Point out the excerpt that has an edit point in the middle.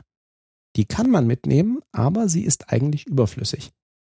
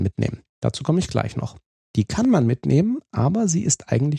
second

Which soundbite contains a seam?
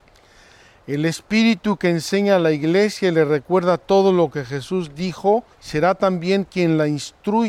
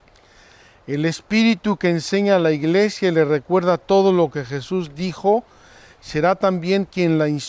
first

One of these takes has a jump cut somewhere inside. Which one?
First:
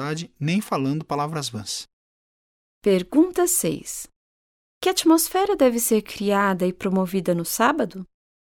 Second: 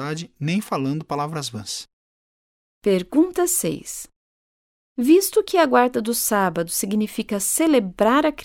second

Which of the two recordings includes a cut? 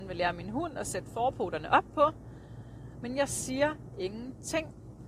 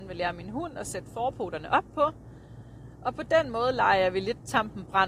first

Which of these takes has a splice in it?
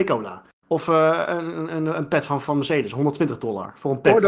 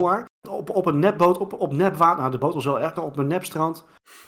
second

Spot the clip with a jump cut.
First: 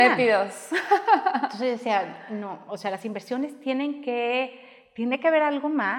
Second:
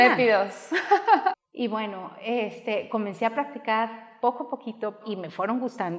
second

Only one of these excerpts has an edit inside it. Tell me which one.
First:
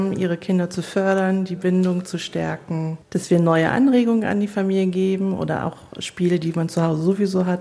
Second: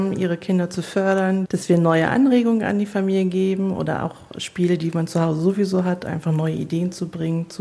second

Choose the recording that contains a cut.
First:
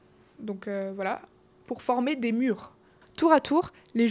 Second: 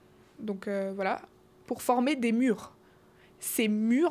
first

